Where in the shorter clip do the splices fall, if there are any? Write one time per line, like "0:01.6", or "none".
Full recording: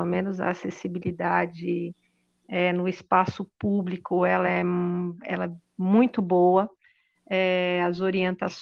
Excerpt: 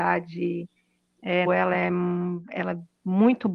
0:01.5